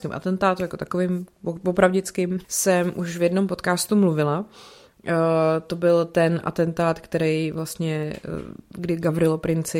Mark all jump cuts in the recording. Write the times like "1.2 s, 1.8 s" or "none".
2.4 s